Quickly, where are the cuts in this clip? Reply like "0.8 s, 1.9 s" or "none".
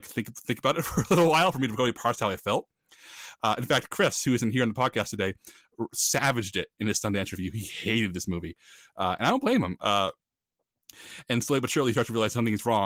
9.8 s